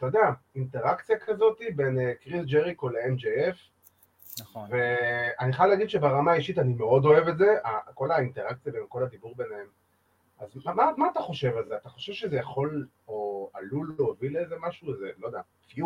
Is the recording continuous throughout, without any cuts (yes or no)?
yes